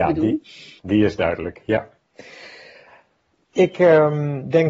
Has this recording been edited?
no; 0 cuts

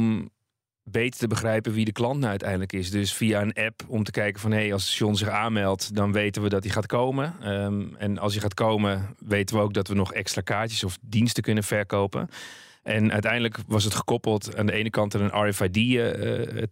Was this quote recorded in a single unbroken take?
yes; 0 cuts

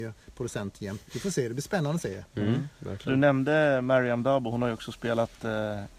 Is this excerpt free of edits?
no; 1 cut; at 1.1 s

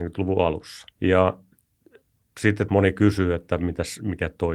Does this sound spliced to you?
yes; 2 cuts; at 0.9 s, 2.7 s

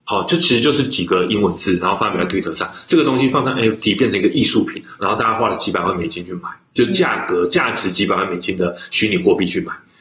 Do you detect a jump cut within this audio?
no; 0 cuts

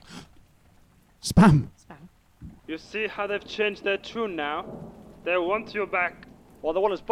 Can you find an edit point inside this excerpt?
yes; 1 cut; at 2.6 s

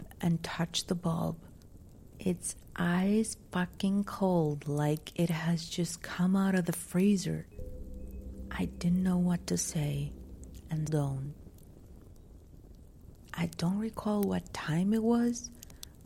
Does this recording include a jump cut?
yes; 2 cuts; at 10.9 s, 13.3 s

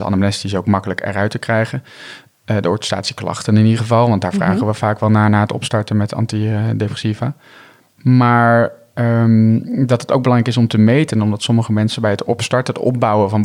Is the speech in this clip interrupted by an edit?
no; 0 cuts

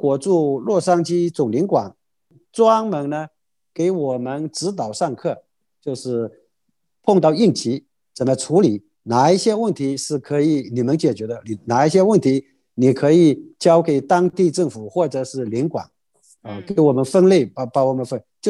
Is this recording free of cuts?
yes; 0 cuts

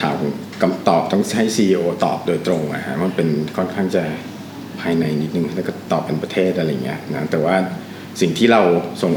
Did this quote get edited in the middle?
no; 0 cuts

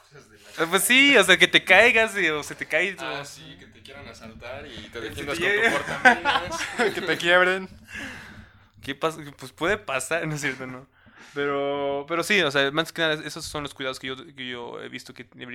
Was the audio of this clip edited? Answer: no; 0 cuts

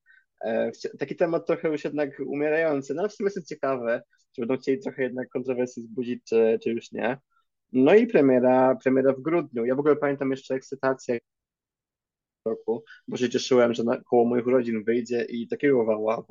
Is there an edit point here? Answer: no; 0 cuts

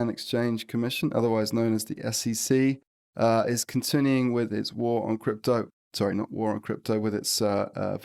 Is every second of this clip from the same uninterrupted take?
yes; 0 cuts

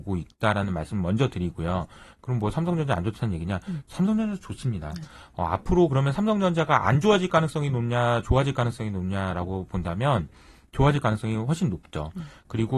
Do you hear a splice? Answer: no; 0 cuts

